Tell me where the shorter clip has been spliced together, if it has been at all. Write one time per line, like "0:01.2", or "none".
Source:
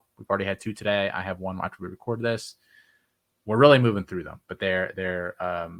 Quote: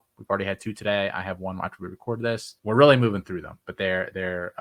0:02.6